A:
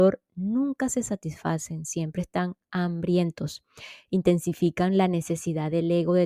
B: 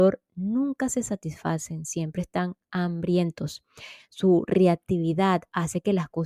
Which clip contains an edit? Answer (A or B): B